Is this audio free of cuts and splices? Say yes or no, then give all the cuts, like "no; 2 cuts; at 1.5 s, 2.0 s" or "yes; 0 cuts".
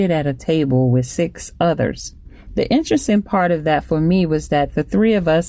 no; 1 cut; at 2.5 s